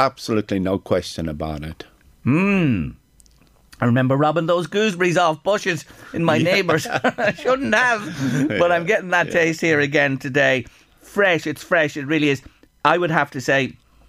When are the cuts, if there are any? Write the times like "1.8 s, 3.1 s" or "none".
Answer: none